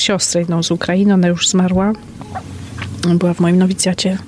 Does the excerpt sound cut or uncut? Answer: uncut